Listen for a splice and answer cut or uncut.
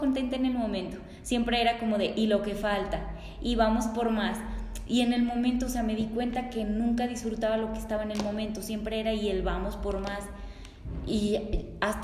uncut